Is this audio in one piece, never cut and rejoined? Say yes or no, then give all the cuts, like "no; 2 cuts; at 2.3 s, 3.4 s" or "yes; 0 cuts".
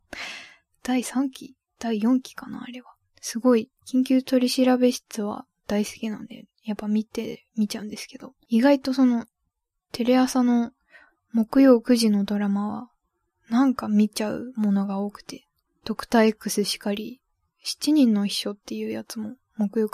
no; 1 cut; at 3.8 s